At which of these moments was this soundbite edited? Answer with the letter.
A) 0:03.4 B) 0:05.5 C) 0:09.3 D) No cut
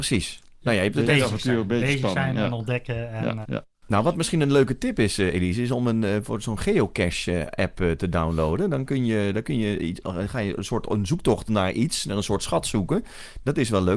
A